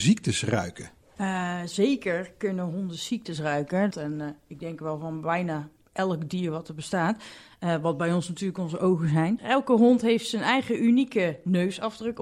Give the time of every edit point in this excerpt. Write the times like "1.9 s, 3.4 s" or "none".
3.9 s, 9.4 s